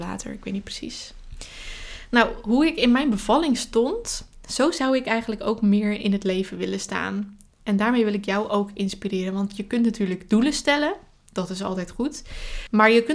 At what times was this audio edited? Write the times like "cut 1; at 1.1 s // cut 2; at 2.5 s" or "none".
none